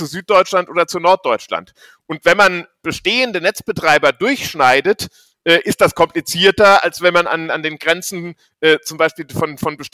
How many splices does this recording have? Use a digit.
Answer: 0